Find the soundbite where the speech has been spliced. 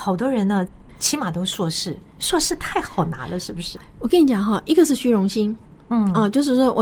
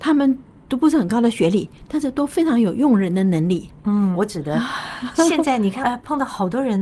second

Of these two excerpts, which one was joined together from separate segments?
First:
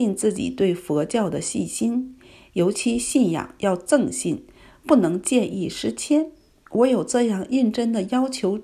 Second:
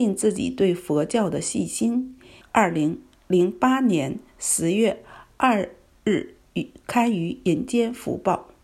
second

